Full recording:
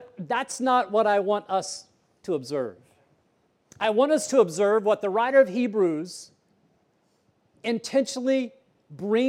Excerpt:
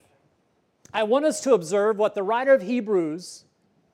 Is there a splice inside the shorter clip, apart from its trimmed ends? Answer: no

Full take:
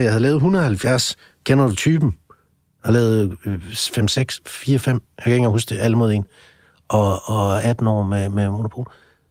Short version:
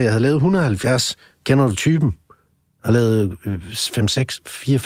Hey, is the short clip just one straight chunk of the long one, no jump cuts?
yes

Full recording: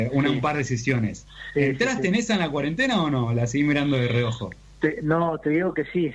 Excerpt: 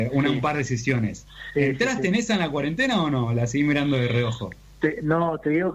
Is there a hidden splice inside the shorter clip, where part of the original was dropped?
no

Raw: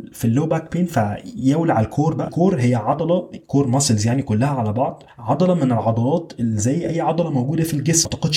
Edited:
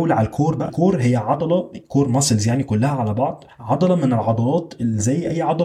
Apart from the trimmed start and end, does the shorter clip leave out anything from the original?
no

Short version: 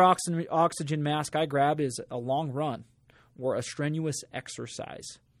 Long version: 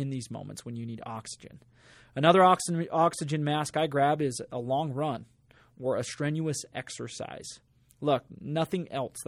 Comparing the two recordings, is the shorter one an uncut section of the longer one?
yes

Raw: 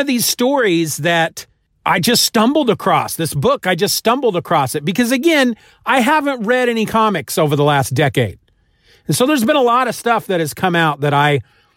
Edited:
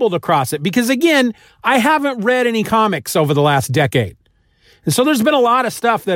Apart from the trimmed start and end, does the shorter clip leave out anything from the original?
no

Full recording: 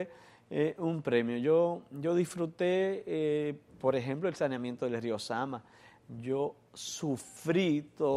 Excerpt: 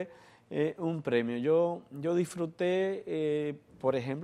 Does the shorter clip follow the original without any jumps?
yes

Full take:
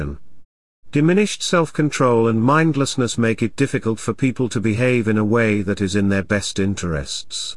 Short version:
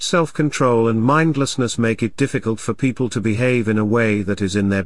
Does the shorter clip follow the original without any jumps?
yes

